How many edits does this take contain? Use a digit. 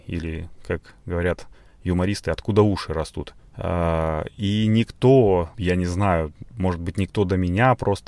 2